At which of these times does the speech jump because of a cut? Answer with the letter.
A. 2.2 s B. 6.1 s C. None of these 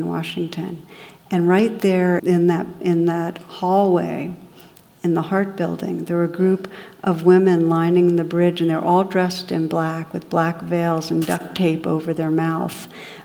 A